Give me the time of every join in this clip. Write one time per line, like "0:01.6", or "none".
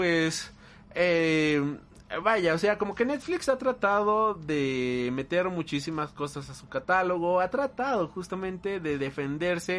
0:02.2